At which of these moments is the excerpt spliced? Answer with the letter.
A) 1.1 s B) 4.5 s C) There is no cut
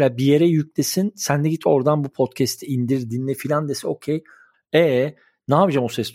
B